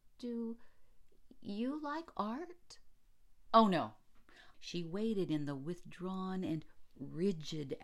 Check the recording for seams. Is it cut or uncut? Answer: cut